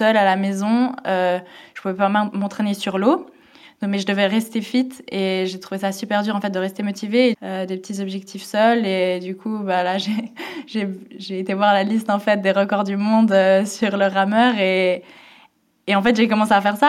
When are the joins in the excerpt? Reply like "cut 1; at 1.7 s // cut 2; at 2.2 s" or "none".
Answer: cut 1; at 7.3 s